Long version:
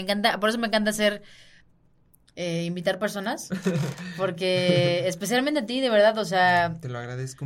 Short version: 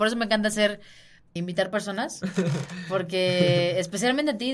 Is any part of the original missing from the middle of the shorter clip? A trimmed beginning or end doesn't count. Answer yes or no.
yes